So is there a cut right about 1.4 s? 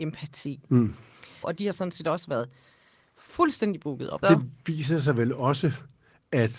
yes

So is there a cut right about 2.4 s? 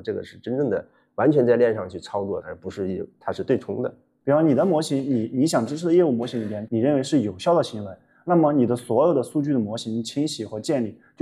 yes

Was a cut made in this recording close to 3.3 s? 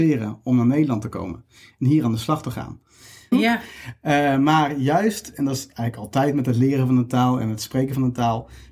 yes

